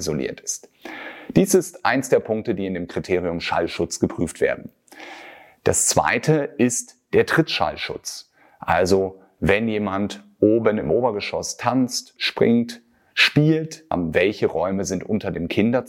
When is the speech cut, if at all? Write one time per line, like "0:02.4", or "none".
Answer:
0:12.2
0:13.9